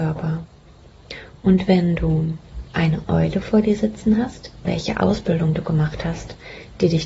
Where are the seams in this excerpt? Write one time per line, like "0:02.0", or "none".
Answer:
0:02.7
0:04.7